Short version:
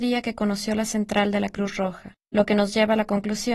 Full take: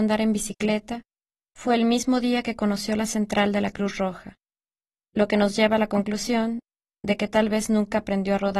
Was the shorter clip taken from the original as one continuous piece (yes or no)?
no